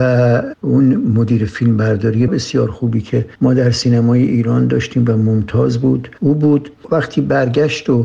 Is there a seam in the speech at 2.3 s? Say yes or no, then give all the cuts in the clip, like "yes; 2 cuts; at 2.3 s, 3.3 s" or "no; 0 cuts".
yes; 1 cut; at 2.3 s